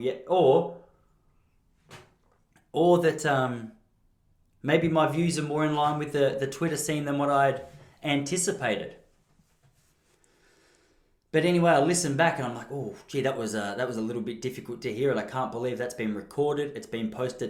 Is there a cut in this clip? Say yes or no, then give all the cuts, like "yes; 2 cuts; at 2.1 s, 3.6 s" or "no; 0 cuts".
no; 0 cuts